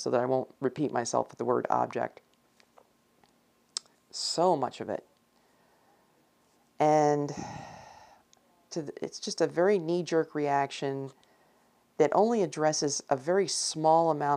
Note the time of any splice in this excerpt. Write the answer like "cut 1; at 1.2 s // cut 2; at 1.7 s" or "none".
cut 1; at 3.9 s